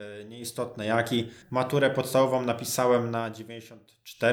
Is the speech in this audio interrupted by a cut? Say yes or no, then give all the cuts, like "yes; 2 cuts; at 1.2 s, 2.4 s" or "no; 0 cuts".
yes; 1 cut; at 1.4 s